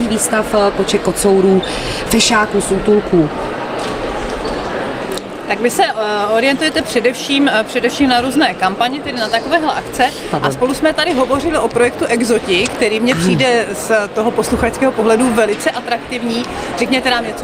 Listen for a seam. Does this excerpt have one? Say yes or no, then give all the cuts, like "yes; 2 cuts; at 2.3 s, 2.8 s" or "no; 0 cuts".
no; 0 cuts